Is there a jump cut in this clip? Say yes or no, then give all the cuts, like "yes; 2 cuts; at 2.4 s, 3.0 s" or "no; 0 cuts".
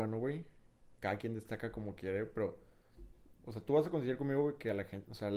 no; 0 cuts